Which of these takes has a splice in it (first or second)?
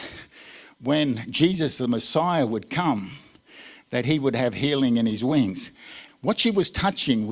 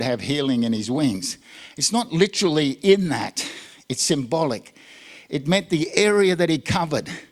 first